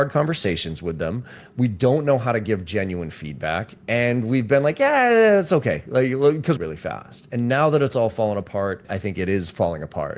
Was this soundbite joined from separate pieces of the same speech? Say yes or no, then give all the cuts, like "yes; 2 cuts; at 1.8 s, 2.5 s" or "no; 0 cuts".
yes; 2 cuts; at 6.6 s, 8.8 s